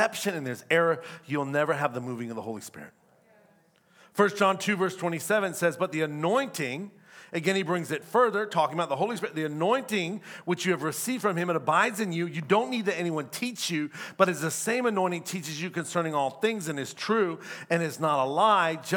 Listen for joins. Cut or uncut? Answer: uncut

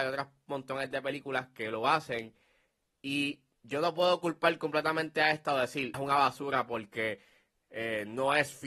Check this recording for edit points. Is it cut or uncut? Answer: cut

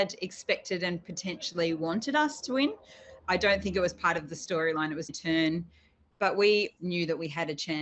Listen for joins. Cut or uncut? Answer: cut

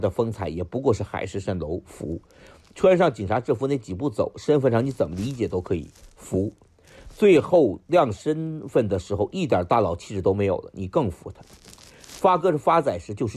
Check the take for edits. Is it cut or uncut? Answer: uncut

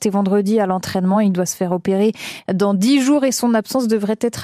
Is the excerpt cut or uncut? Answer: uncut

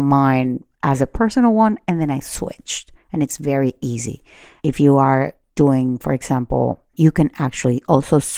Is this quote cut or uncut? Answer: cut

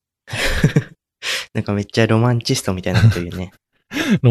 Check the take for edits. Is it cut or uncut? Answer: uncut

